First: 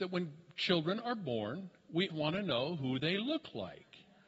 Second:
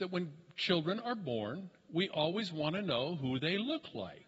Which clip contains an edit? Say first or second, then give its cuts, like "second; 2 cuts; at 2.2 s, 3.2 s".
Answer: first; 1 cut; at 2.1 s